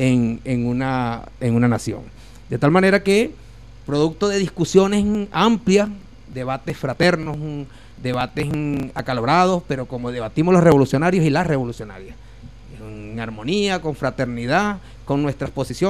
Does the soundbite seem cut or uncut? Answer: uncut